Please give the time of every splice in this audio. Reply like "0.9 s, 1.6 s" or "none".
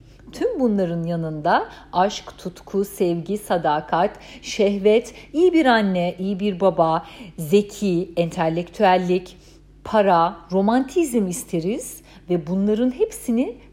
none